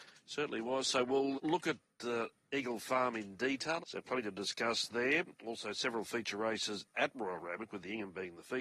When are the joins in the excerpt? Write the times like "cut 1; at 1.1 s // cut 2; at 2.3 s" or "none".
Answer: cut 1; at 1.3 s // cut 2; at 3.8 s